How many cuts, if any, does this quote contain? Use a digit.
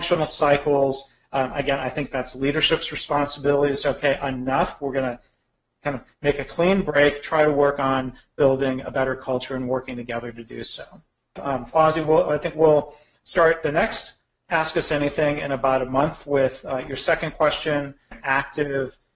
2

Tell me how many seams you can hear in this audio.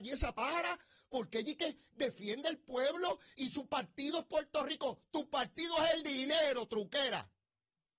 1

